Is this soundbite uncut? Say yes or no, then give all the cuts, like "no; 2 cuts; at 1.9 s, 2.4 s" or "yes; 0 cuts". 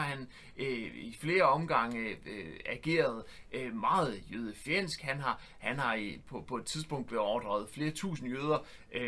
yes; 0 cuts